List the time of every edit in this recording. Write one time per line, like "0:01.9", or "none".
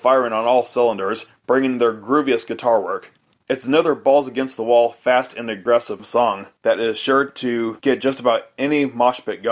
0:03.3